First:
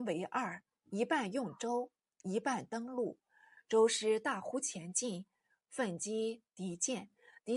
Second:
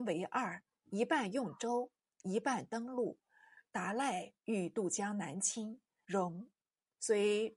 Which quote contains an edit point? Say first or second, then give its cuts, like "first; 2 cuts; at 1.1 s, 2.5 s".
second; 2 cuts; at 3.7 s, 6.0 s